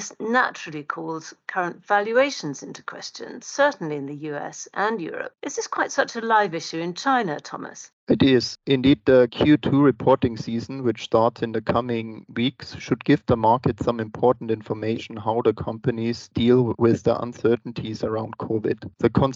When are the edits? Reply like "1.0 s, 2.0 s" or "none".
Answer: none